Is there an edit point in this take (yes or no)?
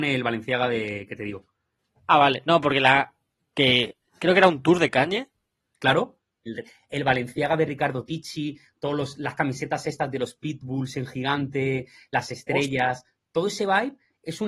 yes